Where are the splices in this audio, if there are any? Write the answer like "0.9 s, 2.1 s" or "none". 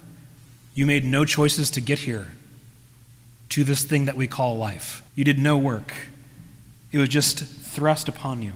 5.1 s